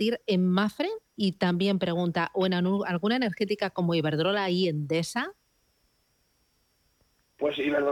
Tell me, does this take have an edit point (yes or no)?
no